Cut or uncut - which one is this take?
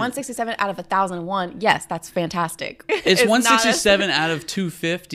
cut